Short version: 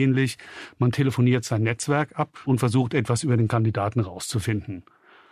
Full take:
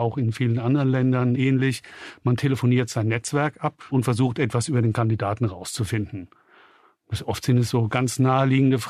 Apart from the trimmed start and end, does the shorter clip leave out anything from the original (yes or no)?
no